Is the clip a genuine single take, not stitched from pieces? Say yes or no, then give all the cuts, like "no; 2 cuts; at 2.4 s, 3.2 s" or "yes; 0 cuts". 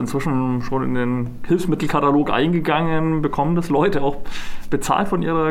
yes; 0 cuts